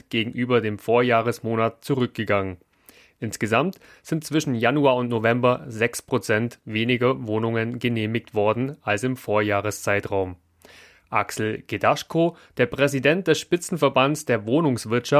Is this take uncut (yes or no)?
yes